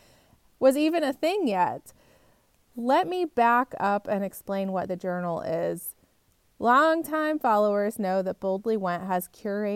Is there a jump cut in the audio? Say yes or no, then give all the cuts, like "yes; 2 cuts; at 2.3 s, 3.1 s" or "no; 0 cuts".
no; 0 cuts